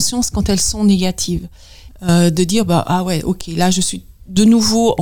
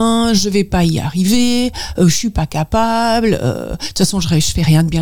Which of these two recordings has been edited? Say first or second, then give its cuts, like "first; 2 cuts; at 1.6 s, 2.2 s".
first; 1 cut; at 1.9 s